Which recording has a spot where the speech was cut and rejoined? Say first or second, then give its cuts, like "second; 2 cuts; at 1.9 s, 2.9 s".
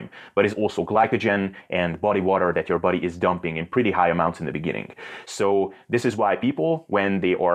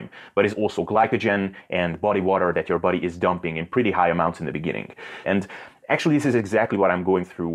second; 1 cut; at 5.2 s